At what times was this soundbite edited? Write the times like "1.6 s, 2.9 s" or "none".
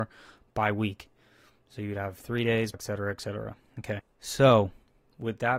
2.7 s, 4.0 s

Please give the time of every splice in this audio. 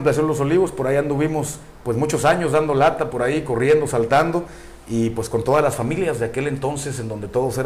none

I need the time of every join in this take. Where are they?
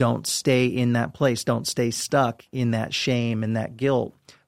none

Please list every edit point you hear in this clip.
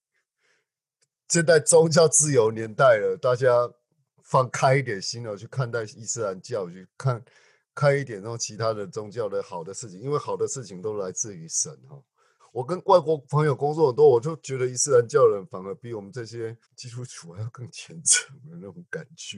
12.4 s, 16.6 s

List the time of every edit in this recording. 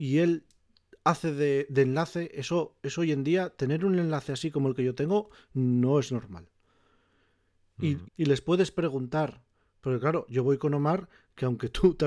8.0 s

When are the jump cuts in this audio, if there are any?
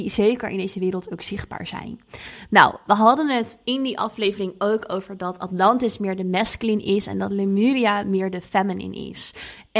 none

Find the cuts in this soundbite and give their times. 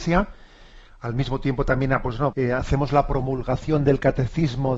2.3 s

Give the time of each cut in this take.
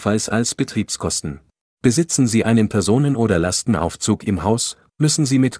1.8 s

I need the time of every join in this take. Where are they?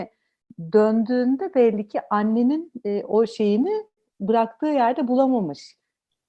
none

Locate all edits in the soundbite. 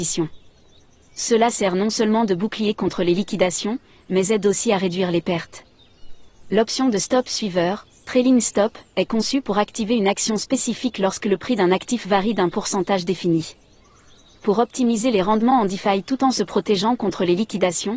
none

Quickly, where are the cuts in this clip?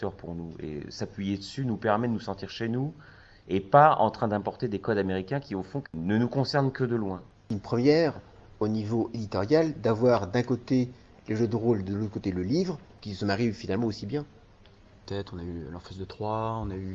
5.8 s, 15.1 s

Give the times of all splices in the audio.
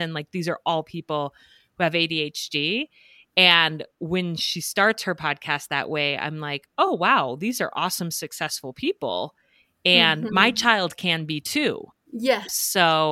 none

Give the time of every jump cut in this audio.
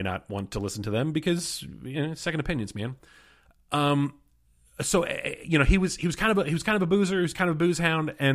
none

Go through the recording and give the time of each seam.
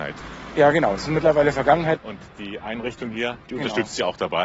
2.0 s, 3.4 s

